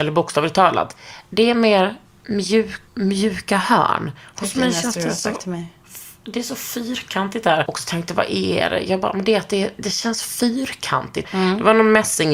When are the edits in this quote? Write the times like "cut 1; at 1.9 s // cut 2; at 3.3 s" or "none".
cut 1; at 2.9 s // cut 2; at 7.7 s // cut 3; at 11.2 s